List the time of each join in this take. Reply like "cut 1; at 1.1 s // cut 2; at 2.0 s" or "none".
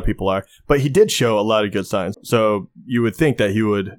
cut 1; at 2.1 s